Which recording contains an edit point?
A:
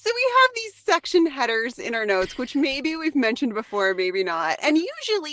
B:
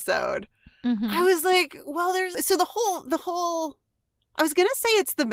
B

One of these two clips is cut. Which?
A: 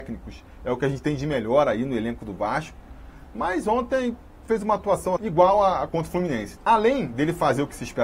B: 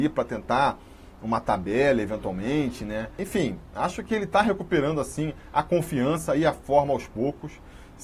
A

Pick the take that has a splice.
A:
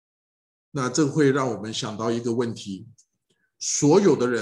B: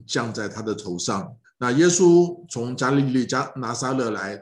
B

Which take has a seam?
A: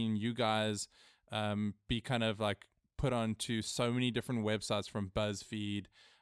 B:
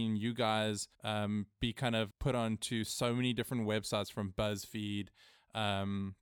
B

